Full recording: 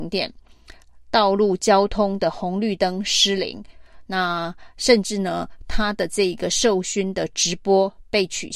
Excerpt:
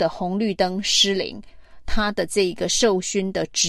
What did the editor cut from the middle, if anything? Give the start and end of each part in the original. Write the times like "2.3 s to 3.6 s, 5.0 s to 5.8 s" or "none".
4.1 s to 5.7 s